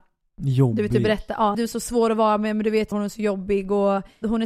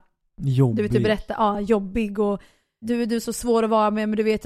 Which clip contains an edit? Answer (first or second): first